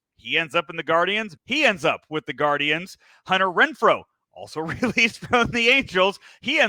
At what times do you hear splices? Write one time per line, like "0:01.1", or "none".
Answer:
0:01.4